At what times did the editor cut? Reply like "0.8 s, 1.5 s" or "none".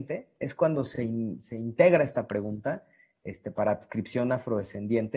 none